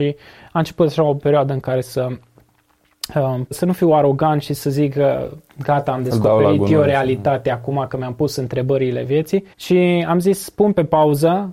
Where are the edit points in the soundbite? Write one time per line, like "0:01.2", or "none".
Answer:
0:03.5
0:09.5